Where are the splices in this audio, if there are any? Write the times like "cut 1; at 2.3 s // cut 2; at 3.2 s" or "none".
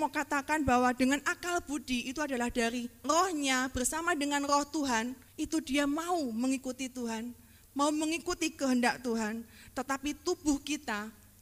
cut 1; at 5.3 s